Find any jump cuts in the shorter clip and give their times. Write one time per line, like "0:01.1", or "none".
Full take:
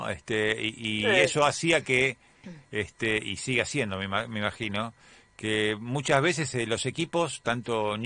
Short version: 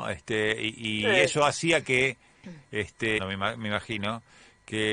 0:03.2